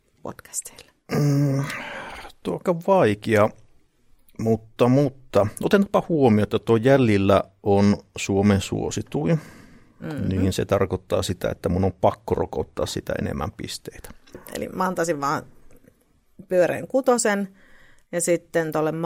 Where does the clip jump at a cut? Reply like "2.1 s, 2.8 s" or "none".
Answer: 14.3 s